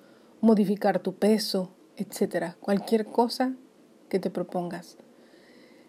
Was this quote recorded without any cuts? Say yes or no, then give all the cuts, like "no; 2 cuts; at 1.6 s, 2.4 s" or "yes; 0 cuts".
no; 1 cut; at 1.9 s